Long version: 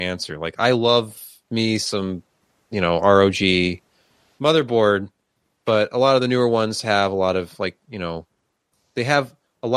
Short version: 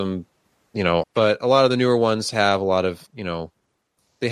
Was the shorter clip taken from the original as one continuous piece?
no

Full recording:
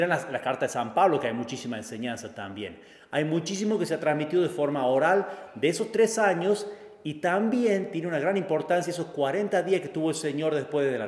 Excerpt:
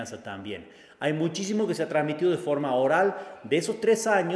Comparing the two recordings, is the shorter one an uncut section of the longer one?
yes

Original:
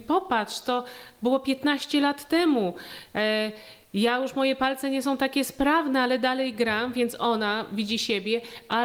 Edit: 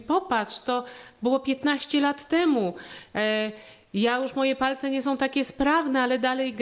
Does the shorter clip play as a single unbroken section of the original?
yes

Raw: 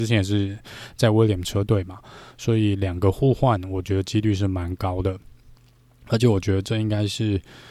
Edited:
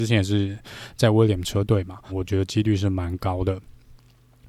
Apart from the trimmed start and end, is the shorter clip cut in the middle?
yes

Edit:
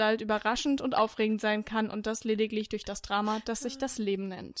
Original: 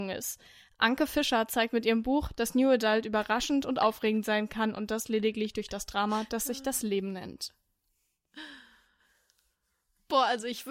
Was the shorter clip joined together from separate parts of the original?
no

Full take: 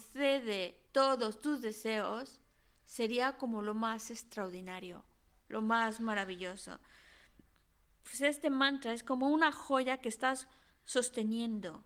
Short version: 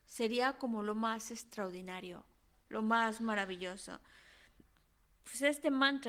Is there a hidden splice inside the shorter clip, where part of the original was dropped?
no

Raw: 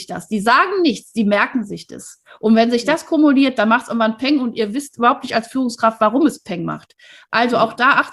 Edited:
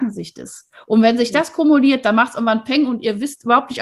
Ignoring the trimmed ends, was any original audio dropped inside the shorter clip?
no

